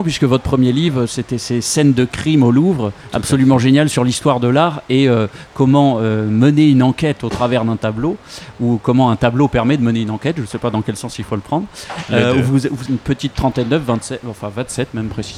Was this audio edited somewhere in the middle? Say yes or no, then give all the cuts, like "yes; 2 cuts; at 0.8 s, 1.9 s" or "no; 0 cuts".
yes; 1 cut; at 12.9 s